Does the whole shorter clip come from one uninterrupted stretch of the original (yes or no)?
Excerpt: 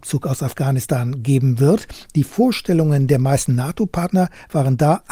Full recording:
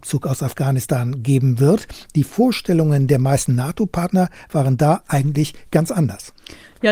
yes